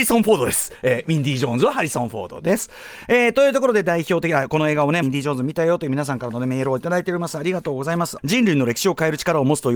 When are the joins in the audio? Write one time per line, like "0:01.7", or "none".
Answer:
0:05.0
0:08.2